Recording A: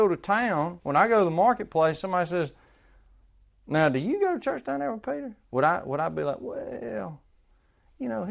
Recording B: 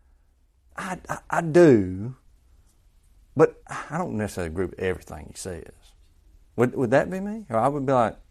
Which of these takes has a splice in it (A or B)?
B